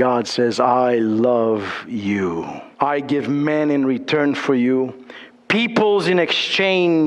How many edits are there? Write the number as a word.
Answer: one